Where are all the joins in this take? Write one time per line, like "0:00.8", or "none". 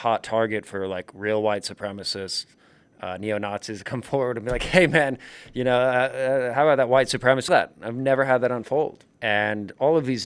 0:07.5
0:09.1